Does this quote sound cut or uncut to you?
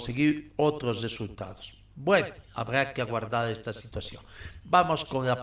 uncut